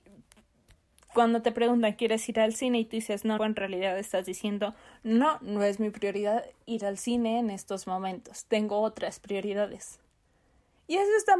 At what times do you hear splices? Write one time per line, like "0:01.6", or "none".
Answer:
0:03.4